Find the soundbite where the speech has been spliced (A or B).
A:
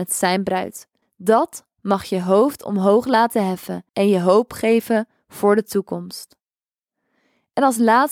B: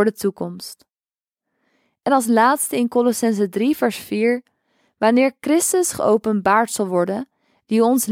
A